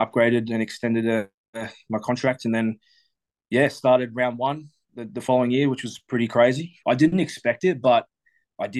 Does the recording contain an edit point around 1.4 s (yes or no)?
no